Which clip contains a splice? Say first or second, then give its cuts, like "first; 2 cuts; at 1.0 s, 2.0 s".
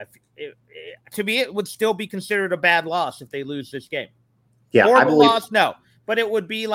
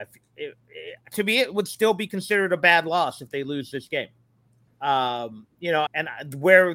second; 2 cuts; at 4.7 s, 5.9 s